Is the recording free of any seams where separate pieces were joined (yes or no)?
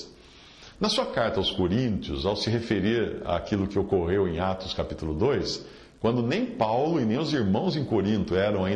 yes